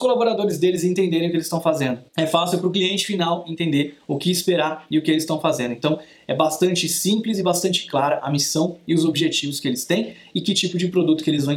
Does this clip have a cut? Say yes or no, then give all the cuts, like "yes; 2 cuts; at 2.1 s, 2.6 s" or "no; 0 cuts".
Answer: yes; 1 cut; at 2.1 s